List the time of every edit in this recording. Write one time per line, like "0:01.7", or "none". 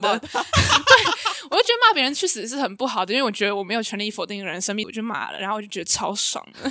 0:04.8